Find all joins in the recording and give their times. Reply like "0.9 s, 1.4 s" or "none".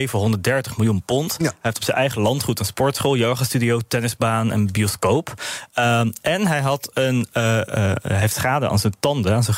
none